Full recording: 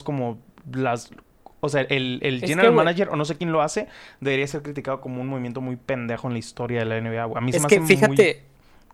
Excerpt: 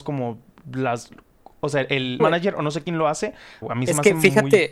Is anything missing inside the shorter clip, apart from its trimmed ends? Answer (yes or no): yes